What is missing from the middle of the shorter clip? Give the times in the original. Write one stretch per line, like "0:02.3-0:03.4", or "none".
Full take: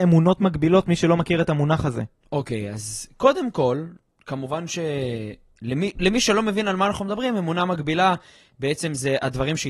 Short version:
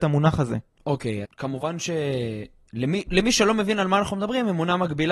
0:02.7-0:04.1